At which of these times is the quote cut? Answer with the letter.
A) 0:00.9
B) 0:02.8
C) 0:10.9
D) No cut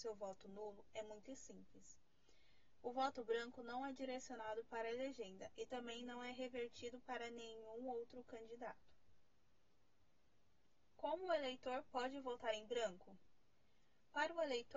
B